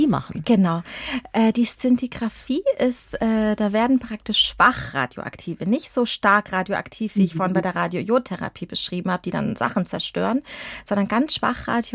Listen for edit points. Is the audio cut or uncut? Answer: uncut